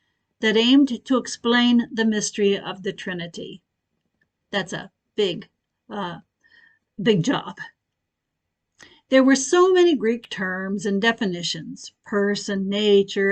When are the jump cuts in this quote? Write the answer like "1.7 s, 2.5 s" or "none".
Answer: none